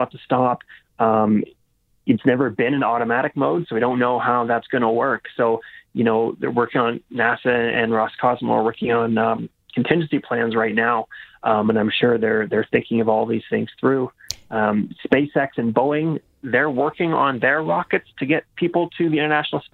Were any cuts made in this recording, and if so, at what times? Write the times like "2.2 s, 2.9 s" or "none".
none